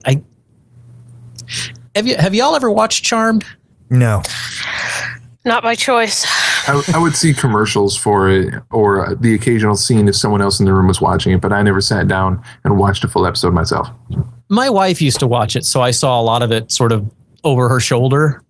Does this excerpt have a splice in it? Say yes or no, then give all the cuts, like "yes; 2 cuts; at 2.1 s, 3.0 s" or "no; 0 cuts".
no; 0 cuts